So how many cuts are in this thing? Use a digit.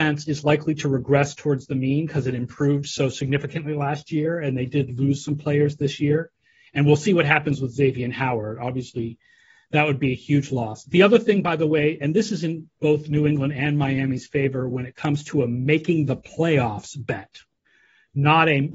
0